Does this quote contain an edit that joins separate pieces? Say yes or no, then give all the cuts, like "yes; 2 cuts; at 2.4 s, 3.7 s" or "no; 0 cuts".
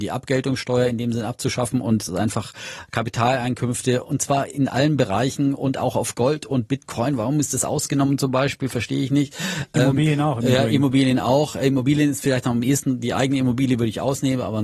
no; 0 cuts